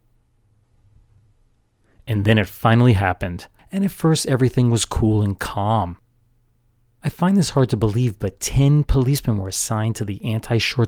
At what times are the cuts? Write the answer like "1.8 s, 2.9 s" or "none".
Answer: 3.6 s

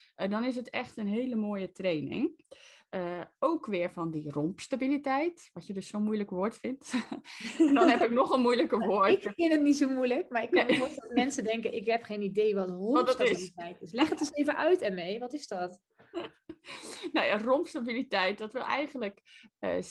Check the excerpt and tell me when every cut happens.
none

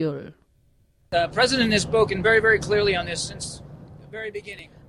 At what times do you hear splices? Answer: none

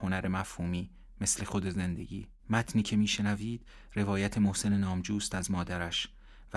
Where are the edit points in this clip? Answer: 2.4 s

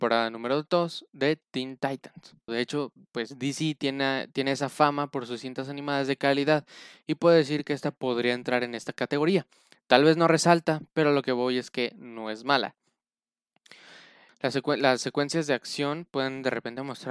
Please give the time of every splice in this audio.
2.5 s, 14.3 s

